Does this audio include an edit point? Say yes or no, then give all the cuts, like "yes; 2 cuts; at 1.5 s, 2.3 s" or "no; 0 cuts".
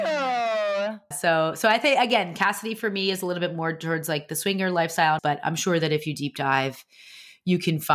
yes; 2 cuts; at 1.1 s, 5.2 s